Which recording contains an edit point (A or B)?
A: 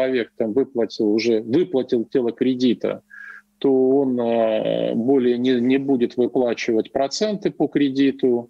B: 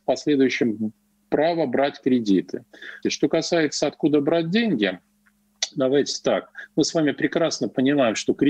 B